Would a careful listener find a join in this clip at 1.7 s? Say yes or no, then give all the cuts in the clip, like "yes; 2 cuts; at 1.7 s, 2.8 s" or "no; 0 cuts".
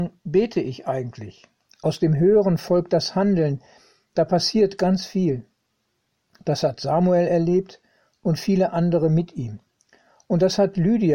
yes; 1 cut; at 1.7 s